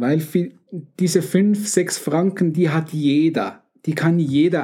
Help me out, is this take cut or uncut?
uncut